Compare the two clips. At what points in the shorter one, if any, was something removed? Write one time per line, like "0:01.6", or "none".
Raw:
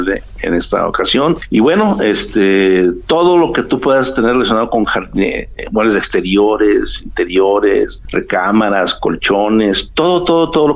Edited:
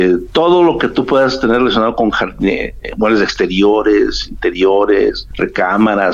none

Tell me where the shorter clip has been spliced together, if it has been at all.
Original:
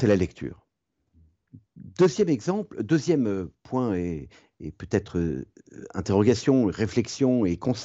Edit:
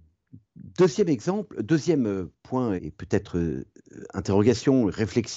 0:02.8

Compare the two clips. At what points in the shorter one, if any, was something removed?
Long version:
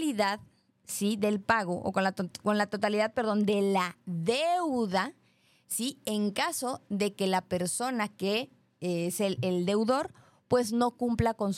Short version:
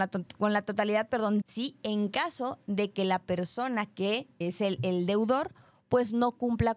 0:01.4
0:04.4

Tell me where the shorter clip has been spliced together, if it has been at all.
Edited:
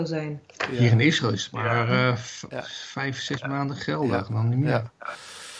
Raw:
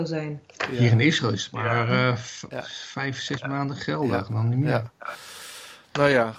none

